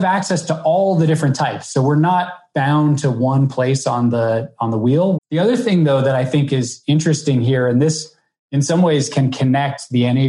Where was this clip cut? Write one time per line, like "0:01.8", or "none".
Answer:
0:05.1